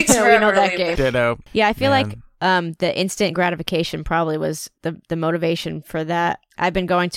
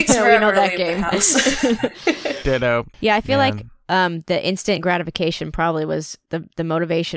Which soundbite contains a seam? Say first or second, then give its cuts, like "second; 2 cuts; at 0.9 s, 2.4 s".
first; 1 cut; at 0.9 s